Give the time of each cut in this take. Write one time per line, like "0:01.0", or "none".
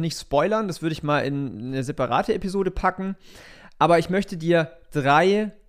none

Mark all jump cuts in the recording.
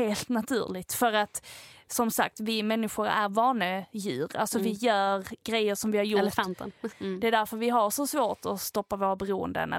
0:06.9

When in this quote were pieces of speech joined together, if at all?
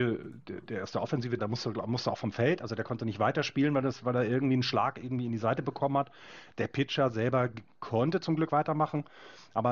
0:01.4

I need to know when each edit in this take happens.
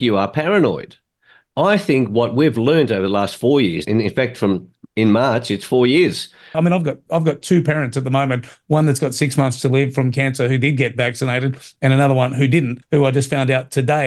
0:03.8
0:06.5
0:12.8

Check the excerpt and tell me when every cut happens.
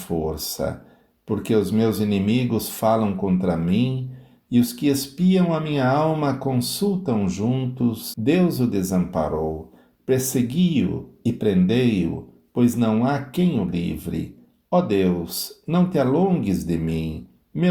0:08.1

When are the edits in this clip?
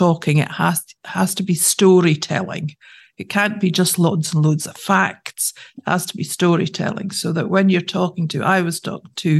none

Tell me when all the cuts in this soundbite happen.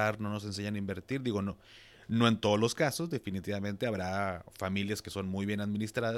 none

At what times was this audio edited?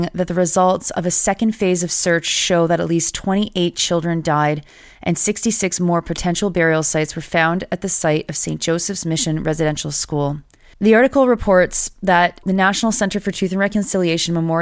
0:10.7
0:12.4

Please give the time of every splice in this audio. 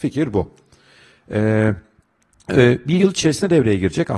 none

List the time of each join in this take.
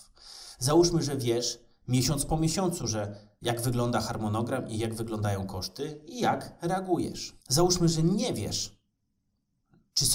0:07.4

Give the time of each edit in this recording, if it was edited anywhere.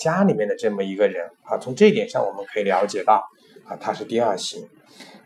none

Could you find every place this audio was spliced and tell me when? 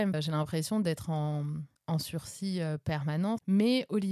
none

